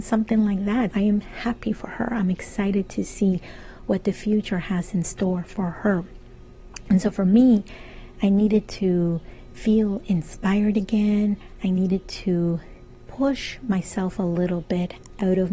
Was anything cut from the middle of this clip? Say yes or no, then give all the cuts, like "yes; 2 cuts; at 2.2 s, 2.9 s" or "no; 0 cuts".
yes; 1 cut; at 0.9 s